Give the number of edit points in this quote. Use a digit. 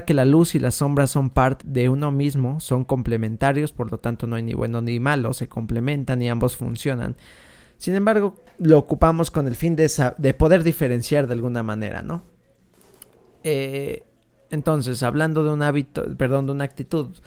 1